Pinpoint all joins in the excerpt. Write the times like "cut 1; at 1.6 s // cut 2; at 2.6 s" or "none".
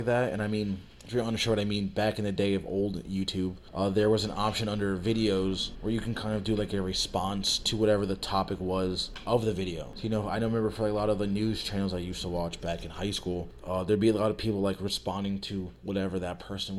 none